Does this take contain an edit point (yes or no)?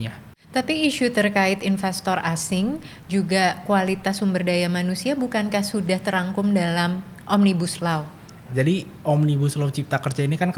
yes